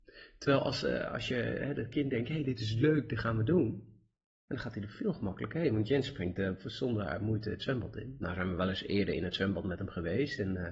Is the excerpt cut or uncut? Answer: uncut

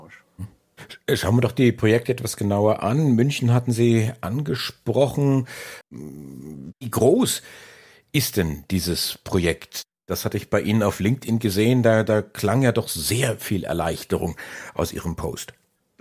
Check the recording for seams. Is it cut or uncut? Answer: cut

